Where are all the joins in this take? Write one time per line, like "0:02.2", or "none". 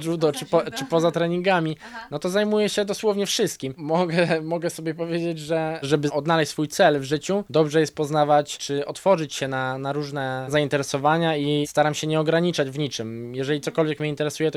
none